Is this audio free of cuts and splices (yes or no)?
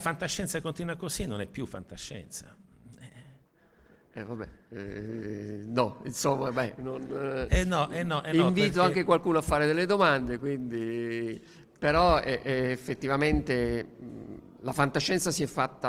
yes